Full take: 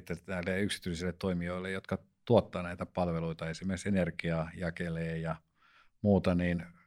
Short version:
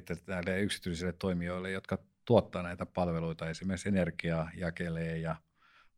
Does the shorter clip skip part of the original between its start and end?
no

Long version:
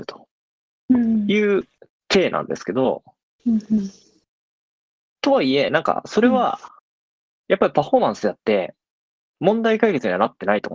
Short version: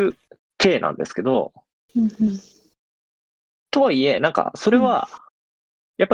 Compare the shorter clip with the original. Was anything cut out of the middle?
no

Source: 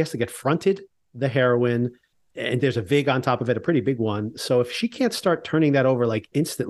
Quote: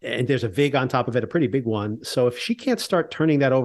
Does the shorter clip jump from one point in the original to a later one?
no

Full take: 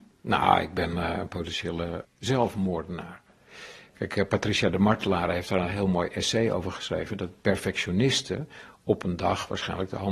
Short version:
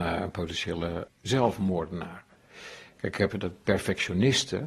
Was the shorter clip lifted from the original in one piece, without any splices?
no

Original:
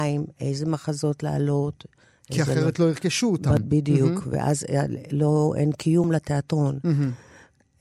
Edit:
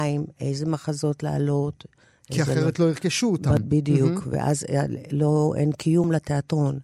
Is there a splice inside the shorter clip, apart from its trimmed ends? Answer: no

